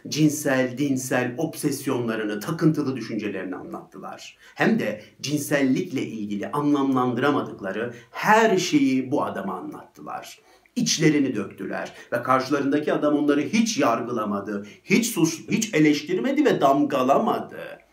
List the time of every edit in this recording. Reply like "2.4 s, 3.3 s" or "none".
15.5 s